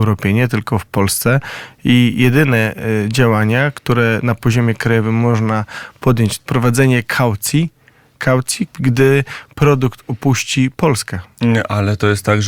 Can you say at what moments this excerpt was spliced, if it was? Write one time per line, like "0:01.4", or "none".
0:06.4
0:08.7